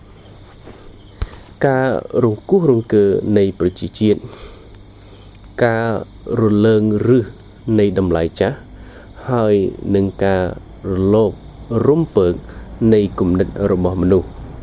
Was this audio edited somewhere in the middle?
no; 0 cuts

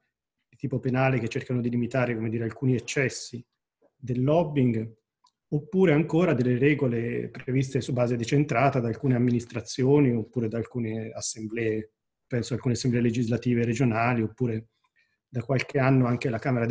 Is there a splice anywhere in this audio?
no; 0 cuts

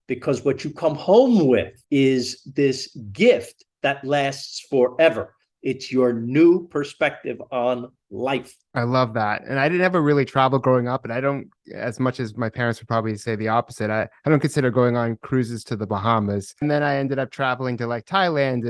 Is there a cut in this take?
no; 0 cuts

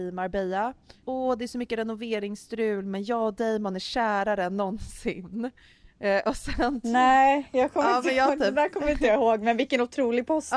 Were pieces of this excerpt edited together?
yes; 1 cut; at 1.0 s

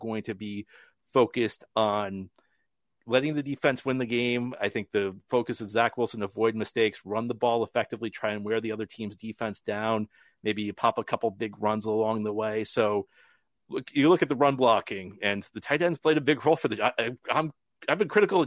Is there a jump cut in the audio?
no; 0 cuts

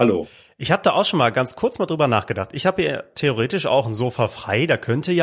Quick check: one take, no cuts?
yes; 0 cuts

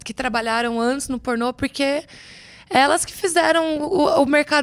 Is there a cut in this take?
no; 0 cuts

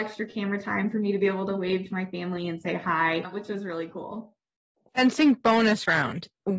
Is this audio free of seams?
yes; 0 cuts

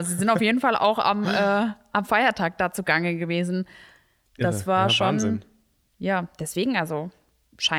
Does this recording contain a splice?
no; 0 cuts

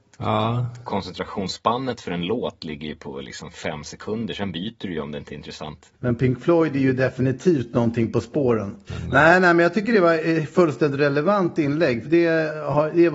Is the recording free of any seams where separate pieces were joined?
no; 3 cuts; at 5.9 s, 8.9 s, 12.0 s

